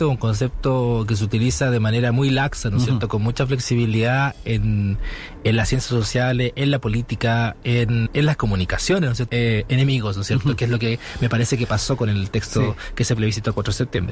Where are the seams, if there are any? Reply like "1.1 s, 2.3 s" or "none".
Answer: 8.1 s, 9.3 s